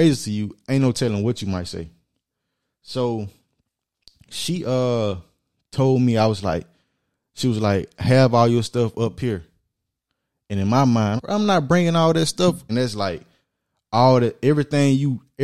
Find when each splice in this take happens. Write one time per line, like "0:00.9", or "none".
0:11.2
0:12.7